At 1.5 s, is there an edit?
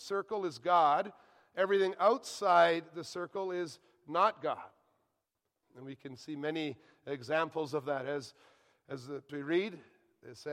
no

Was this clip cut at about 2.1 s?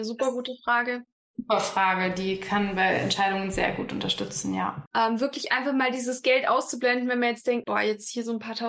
no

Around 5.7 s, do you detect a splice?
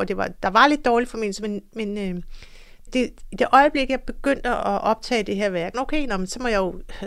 yes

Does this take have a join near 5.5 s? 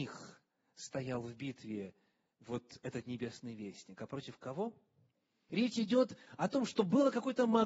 yes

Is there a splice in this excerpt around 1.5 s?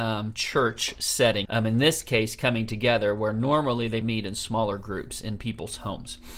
yes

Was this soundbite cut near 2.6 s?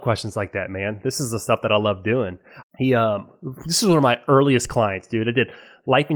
yes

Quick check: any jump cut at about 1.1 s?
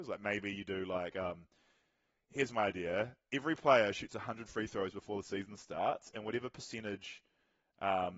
no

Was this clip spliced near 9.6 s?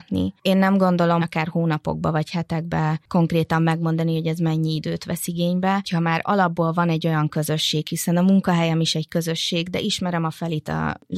no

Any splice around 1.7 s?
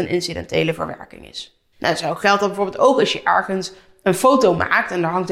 no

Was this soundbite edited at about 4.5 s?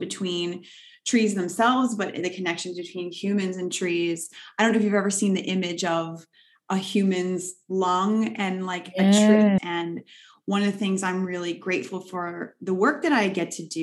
no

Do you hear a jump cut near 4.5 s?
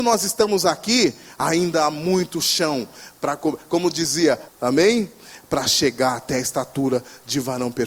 yes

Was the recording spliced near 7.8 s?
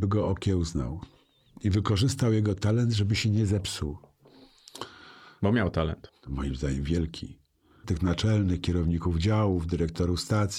yes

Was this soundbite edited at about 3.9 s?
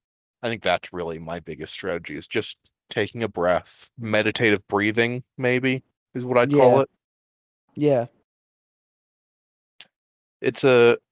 yes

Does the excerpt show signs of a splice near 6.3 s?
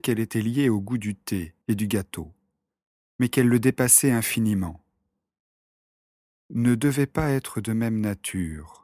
no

